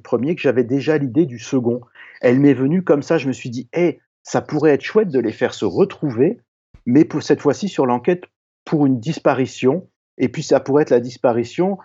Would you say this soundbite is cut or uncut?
uncut